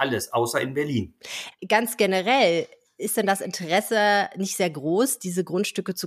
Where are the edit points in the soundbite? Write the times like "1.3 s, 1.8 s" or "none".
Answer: 1.5 s